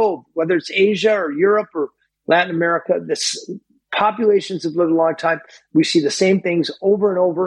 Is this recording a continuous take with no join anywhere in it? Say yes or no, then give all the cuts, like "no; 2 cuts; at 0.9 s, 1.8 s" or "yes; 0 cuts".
yes; 0 cuts